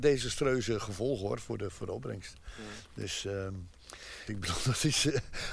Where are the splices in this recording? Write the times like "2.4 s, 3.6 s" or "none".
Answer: 4.3 s